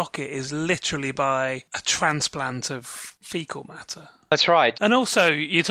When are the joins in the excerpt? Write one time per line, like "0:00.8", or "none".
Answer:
0:04.7